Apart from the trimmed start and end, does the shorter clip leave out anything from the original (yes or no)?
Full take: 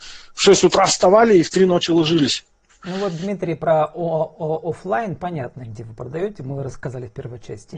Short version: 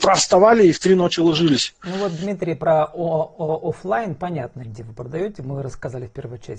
yes